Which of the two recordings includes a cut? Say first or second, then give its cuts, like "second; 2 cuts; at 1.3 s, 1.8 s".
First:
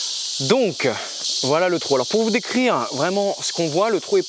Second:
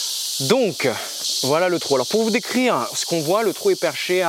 second; 1 cut; at 2.9 s